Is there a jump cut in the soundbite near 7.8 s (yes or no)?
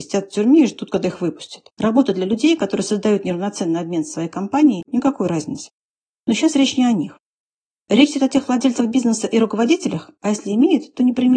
no